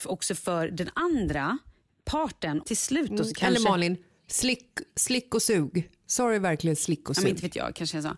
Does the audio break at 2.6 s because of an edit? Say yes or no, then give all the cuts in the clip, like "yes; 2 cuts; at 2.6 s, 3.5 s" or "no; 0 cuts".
yes; 1 cut; at 2.6 s